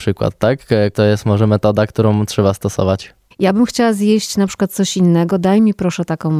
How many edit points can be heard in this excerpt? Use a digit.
2